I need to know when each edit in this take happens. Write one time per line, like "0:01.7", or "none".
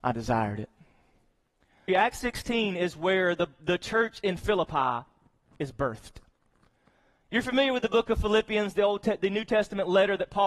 0:01.9